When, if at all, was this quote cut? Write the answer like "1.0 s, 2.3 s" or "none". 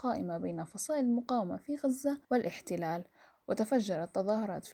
2.2 s